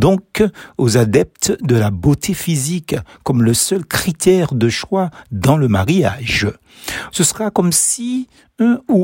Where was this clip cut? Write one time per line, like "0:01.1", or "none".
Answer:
0:07.1